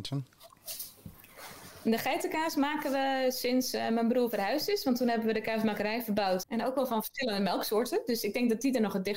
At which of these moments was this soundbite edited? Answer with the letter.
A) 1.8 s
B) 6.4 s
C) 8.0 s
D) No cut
B